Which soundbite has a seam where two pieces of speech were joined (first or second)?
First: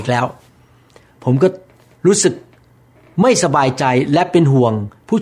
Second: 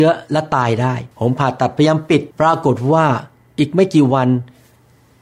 second